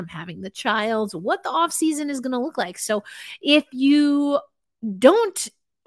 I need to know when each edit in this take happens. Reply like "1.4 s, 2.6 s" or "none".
none